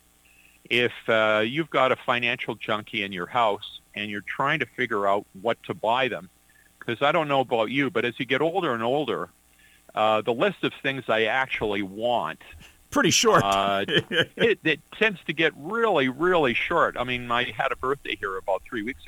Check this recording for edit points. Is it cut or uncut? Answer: uncut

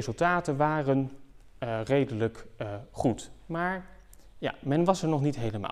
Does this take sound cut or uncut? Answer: uncut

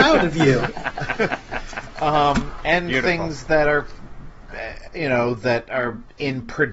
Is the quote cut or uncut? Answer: uncut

